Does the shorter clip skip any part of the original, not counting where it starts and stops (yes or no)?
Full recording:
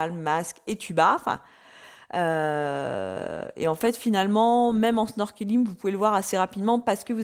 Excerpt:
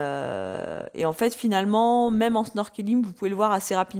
no